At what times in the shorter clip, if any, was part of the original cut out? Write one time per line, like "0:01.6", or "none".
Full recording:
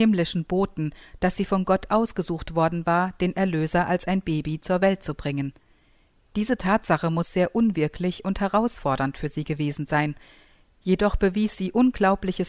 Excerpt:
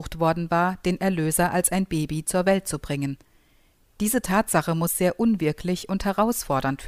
none